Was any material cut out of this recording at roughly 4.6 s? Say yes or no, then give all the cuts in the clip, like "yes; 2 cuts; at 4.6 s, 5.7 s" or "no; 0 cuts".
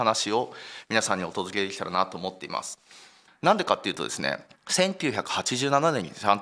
yes; 2 cuts; at 3.3 s, 4.6 s